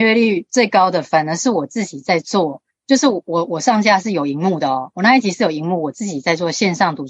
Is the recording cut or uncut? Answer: uncut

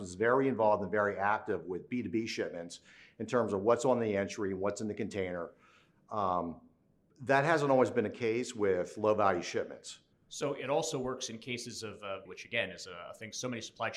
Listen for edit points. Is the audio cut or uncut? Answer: cut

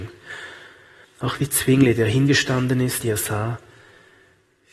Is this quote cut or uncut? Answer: cut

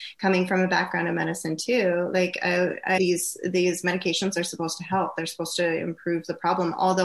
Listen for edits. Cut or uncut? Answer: cut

